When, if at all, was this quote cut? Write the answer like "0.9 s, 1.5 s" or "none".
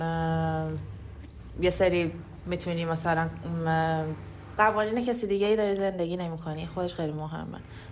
4.6 s

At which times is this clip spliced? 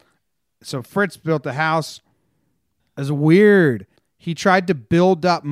2.8 s, 4.0 s

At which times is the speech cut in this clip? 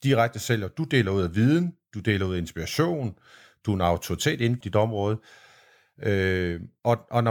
4.6 s

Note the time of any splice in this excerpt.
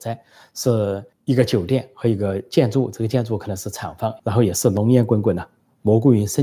1.1 s, 4.2 s

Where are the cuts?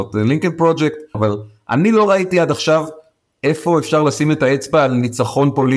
1.1 s

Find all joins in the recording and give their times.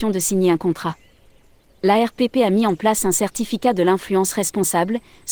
none

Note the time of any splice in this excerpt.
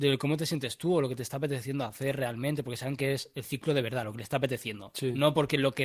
none

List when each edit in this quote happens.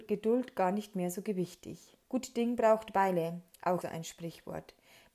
2.0 s, 3.8 s

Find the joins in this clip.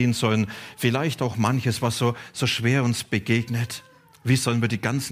none

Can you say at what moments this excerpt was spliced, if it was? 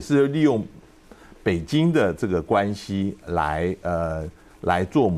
none

